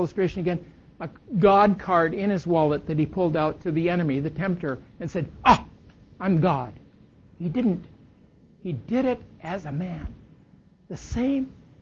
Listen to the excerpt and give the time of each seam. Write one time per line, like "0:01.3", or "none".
none